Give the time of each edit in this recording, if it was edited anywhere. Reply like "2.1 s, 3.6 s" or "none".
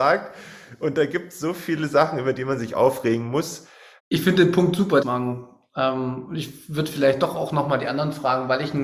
4.0 s, 5.0 s